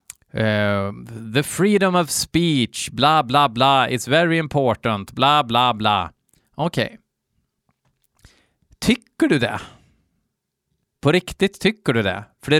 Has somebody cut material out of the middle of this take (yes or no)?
no